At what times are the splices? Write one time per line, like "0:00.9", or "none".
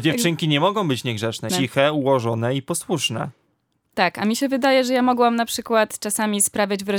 0:01.5